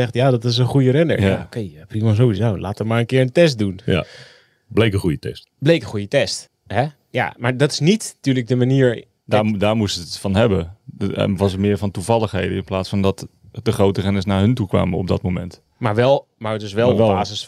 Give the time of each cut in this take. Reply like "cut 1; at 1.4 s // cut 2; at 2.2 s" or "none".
cut 1; at 6.5 s